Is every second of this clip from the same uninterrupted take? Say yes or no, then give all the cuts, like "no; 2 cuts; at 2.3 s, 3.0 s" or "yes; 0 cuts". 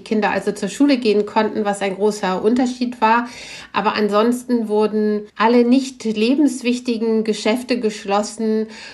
no; 1 cut; at 5.3 s